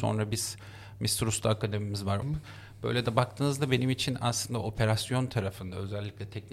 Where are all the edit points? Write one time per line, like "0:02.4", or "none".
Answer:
0:02.2